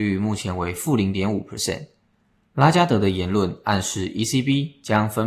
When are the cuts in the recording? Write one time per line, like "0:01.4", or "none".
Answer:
none